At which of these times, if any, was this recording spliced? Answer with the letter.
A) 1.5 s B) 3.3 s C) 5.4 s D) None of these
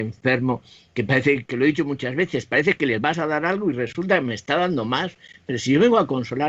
A